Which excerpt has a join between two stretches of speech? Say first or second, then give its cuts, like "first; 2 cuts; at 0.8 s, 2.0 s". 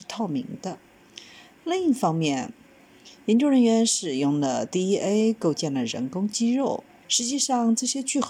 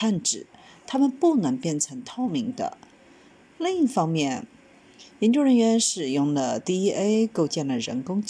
first; 2 cuts; at 1.5 s, 7.0 s